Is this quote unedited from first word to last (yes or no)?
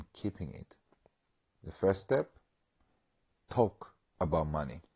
yes